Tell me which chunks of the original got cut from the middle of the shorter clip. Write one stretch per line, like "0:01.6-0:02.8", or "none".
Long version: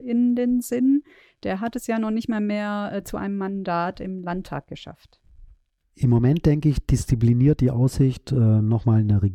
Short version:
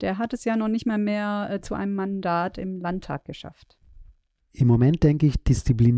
none